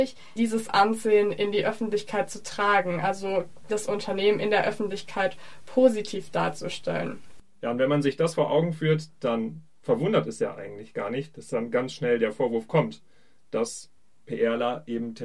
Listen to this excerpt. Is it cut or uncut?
uncut